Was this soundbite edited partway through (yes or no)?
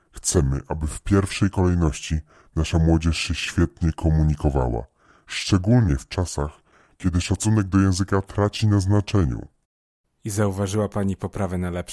no